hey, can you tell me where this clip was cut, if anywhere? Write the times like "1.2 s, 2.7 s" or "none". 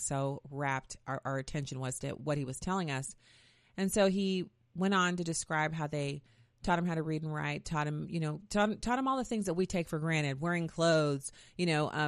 none

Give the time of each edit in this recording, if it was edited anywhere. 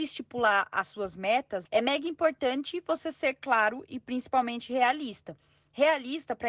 1.6 s

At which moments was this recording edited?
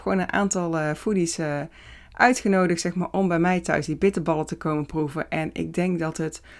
none

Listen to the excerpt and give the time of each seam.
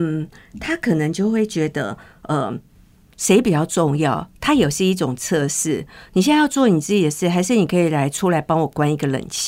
none

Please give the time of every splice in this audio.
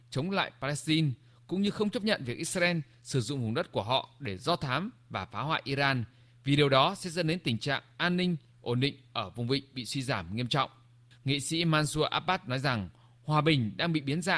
none

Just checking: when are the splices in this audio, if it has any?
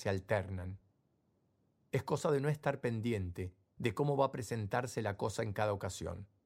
none

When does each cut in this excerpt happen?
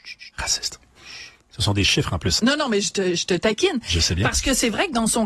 2.4 s

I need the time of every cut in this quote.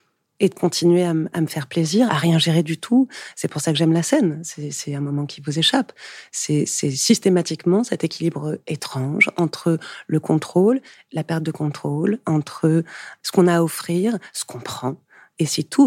2.1 s

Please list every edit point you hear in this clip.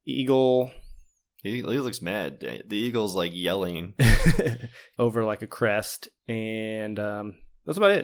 5.0 s

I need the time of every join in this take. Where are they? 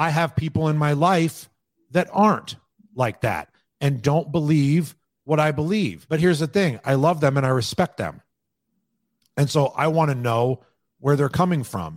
none

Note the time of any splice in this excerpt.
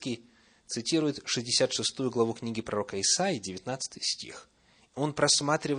4.9 s

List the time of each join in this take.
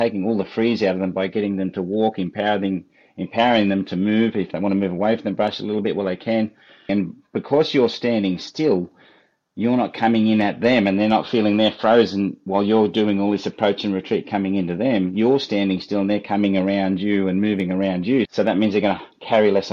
6.9 s, 18.3 s

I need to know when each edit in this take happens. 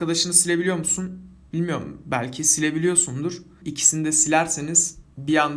3.6 s

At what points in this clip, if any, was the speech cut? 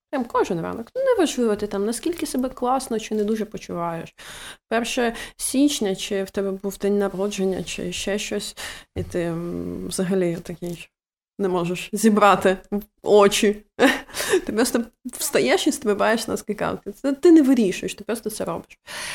17.9 s

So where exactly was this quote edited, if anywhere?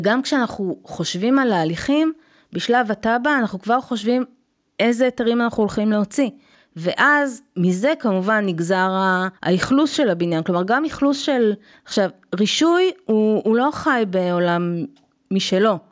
6.5 s, 9.4 s, 11.7 s

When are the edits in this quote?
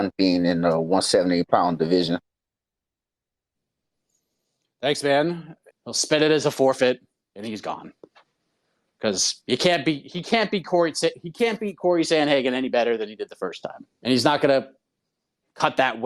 5.7 s, 13.9 s

